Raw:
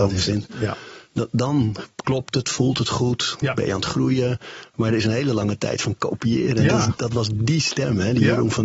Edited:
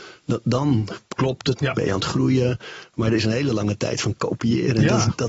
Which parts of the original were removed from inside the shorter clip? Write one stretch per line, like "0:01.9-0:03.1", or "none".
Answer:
0:02.4-0:03.4